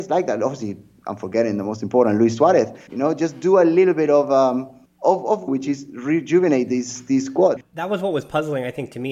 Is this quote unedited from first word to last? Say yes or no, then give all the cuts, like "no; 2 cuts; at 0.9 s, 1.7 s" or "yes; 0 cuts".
no; 2 cuts; at 2.9 s, 5.5 s